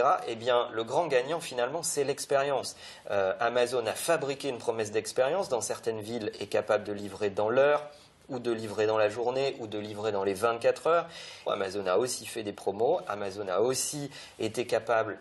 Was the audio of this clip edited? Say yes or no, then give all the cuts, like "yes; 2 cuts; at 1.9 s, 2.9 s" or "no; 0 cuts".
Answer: yes; 1 cut; at 11.5 s